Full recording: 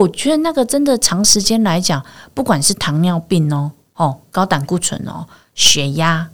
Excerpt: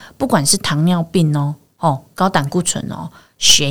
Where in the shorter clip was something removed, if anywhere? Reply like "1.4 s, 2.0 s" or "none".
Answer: none